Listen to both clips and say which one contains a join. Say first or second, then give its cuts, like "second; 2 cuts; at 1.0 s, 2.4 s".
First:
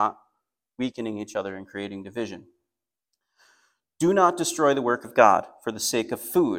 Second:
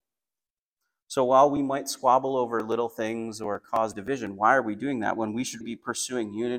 second; 1 cut; at 5.6 s